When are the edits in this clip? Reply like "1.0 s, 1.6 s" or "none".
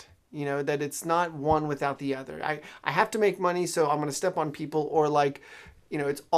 none